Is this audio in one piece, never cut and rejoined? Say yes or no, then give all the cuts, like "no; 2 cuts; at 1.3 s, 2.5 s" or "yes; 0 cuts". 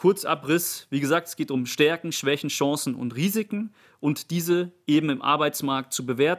yes; 0 cuts